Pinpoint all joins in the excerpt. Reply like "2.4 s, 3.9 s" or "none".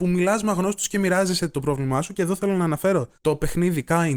3.2 s